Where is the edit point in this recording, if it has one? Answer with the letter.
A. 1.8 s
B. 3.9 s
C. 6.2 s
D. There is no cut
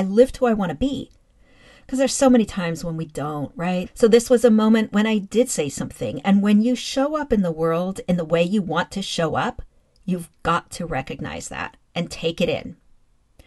B